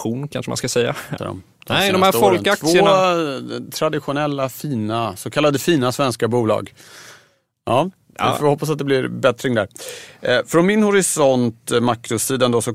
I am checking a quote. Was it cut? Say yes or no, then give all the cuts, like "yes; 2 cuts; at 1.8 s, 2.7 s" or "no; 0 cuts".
yes; 1 cut; at 1.2 s